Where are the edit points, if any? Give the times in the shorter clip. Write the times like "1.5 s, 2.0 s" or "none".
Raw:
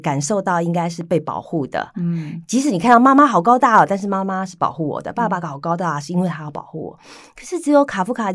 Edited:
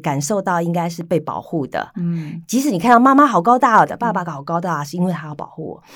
3.9 s